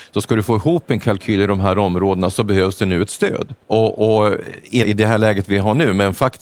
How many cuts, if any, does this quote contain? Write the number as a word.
two